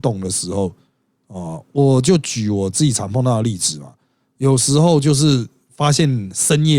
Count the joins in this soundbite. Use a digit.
0